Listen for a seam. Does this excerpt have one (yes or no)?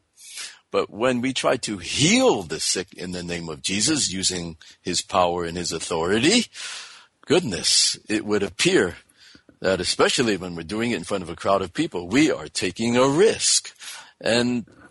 no